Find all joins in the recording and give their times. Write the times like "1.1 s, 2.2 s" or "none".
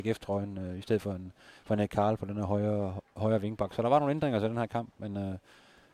none